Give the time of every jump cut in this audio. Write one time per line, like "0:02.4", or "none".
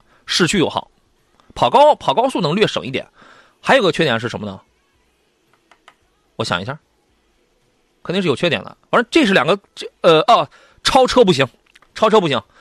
none